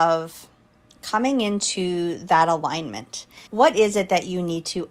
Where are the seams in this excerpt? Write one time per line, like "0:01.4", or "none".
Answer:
0:03.5